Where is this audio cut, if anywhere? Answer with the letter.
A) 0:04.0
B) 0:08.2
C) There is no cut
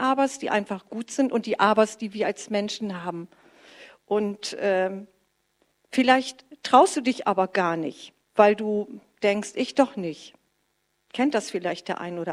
B